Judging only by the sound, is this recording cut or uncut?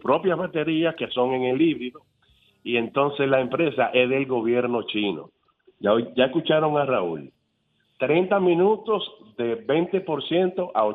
cut